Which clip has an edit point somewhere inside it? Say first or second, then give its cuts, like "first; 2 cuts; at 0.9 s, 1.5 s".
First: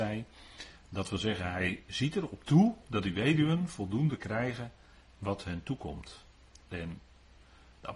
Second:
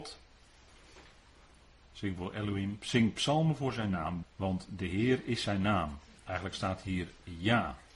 second; 1 cut; at 4.2 s